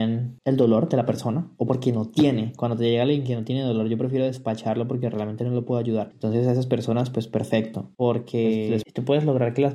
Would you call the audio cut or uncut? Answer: cut